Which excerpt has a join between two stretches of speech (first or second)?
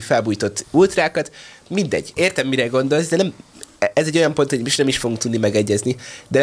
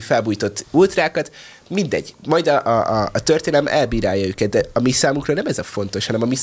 first